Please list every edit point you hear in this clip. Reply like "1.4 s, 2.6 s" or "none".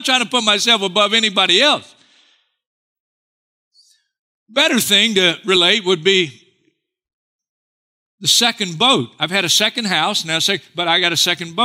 none